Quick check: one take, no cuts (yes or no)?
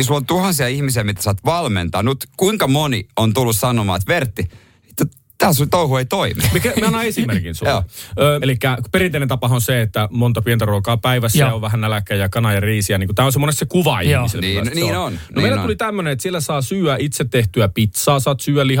no